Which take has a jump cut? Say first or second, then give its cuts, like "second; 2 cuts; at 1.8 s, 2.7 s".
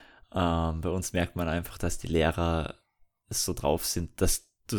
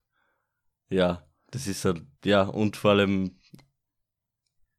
second; 1 cut; at 2.1 s